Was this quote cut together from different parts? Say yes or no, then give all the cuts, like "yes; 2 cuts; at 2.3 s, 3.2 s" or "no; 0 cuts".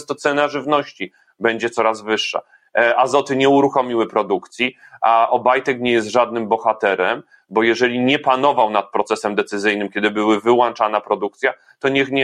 no; 0 cuts